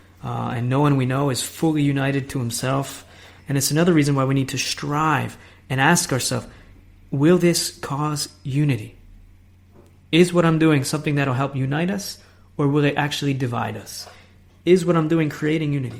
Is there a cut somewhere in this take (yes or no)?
yes